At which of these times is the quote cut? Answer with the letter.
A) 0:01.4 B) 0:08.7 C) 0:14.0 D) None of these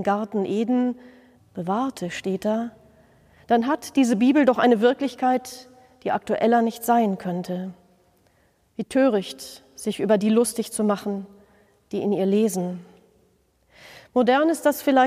A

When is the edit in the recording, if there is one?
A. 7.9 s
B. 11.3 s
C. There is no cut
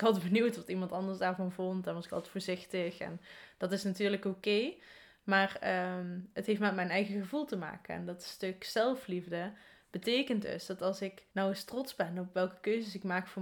B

